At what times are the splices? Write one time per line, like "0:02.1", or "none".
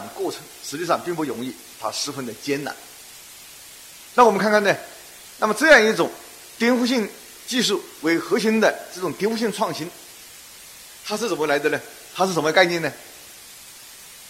none